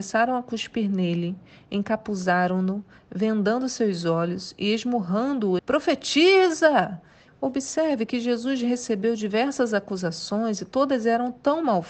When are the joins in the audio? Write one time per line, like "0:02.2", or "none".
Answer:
0:05.6
0:07.3